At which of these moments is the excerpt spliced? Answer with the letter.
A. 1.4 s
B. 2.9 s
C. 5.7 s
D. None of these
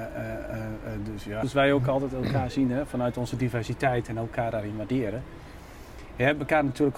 A